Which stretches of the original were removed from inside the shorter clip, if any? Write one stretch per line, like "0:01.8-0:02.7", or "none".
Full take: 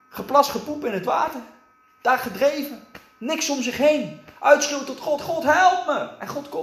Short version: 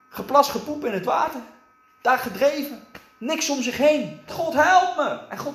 0:04.3-0:05.2